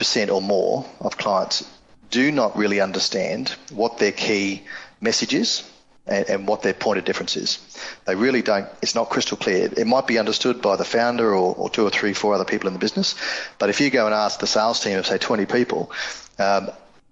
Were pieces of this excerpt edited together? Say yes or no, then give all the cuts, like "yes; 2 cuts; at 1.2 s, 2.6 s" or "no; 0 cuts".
no; 0 cuts